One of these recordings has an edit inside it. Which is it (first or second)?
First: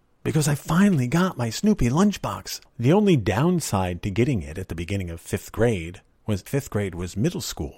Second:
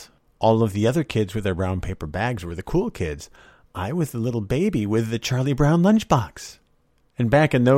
first